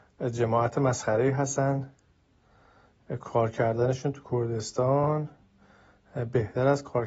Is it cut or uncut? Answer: uncut